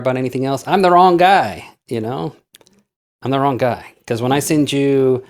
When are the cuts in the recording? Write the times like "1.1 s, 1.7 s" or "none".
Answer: none